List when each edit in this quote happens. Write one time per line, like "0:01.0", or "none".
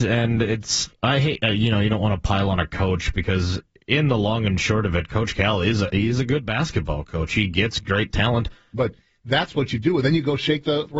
0:08.7